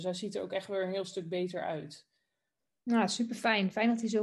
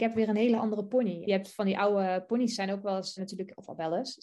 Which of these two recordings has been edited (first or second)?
second